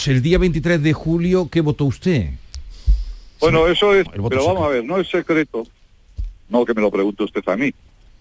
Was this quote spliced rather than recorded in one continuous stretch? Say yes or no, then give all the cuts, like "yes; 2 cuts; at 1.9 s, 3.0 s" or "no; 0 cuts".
yes; 2 cuts; at 4.0 s, 6.5 s